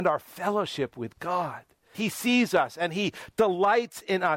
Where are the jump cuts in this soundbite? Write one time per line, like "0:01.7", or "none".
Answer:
0:01.9